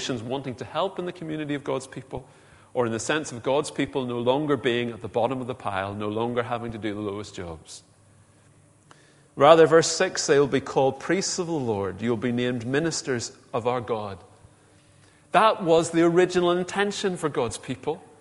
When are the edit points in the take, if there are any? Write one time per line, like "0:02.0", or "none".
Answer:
none